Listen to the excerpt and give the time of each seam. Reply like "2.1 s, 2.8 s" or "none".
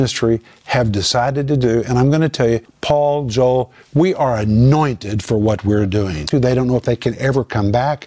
2.6 s, 6.3 s